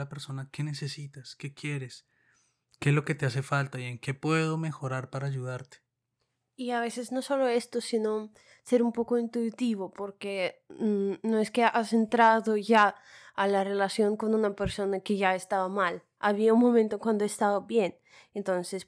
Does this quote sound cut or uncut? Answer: uncut